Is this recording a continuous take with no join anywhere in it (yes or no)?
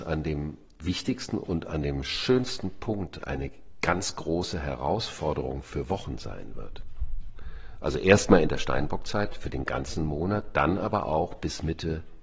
yes